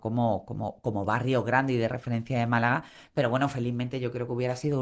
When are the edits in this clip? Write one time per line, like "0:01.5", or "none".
none